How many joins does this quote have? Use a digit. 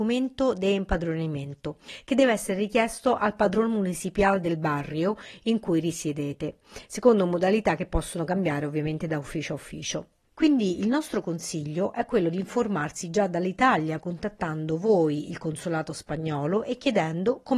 1